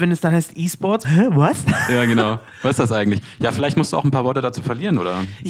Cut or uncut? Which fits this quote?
cut